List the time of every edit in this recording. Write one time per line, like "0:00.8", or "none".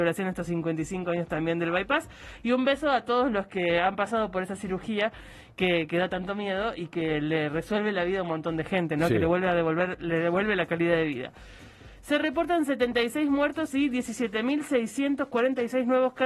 none